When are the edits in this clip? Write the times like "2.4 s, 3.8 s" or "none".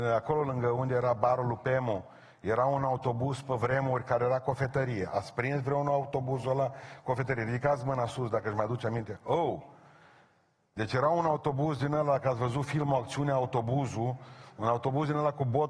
none